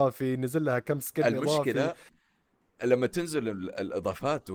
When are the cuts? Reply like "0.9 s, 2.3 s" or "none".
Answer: none